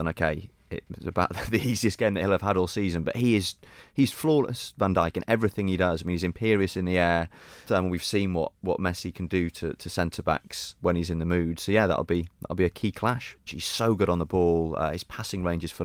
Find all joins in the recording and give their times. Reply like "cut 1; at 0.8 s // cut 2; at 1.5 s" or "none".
cut 1; at 7.7 s // cut 2; at 10.8 s // cut 3; at 13.5 s

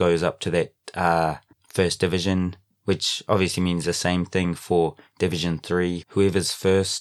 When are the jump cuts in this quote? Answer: cut 1; at 6.0 s

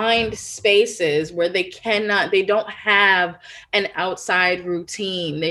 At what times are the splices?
none

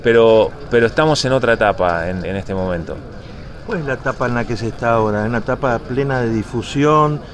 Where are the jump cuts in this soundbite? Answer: cut 1; at 2.2 s

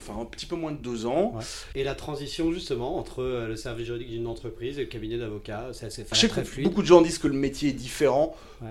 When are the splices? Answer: cut 1; at 1.7 s // cut 2; at 6.1 s

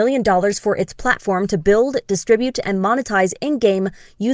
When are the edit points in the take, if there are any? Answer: none

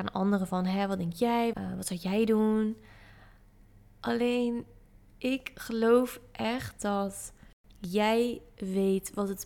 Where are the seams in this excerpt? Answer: cut 1; at 1.5 s

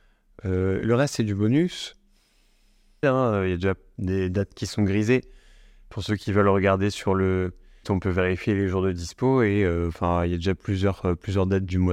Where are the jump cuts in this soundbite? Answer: cut 1; at 3.0 s // cut 2; at 7.8 s

